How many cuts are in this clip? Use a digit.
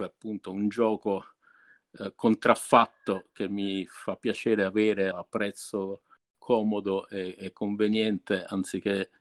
1